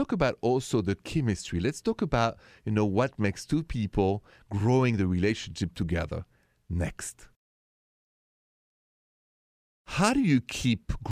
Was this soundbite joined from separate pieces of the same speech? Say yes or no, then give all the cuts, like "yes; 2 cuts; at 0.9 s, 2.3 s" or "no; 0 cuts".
no; 0 cuts